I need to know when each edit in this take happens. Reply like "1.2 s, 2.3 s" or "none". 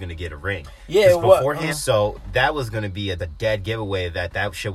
1.7 s, 3.2 s